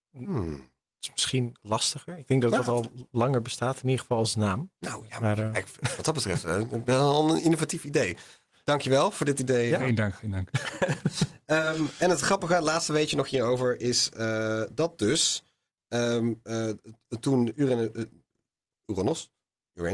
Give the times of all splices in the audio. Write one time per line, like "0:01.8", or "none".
none